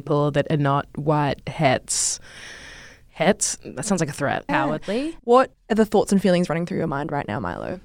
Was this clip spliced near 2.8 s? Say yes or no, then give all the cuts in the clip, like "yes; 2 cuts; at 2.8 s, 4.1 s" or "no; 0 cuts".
no; 2 cuts; at 1.4 s, 4.5 s